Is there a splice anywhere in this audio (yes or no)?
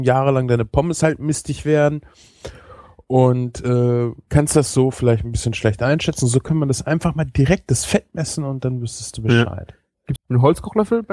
yes